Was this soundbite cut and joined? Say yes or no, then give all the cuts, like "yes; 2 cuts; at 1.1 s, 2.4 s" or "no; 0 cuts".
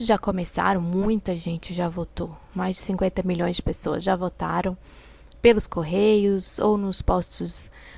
no; 0 cuts